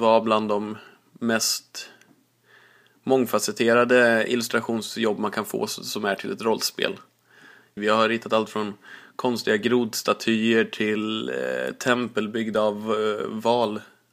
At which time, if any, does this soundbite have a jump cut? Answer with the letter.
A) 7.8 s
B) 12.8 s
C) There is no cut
A